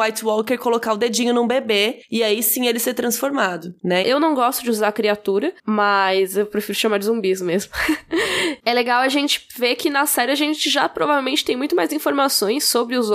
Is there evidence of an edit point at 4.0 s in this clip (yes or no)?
yes